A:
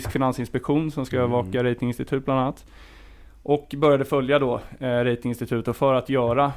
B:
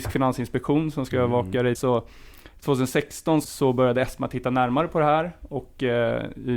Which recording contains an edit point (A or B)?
B